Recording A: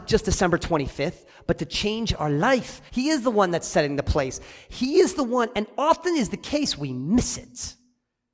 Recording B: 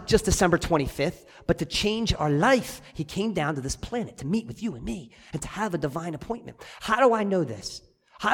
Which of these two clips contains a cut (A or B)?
A